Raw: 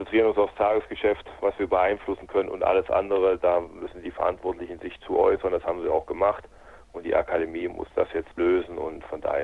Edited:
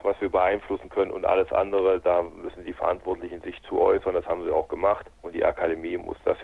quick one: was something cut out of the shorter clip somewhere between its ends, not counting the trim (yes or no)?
yes